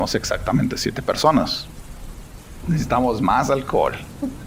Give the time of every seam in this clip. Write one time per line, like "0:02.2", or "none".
0:02.6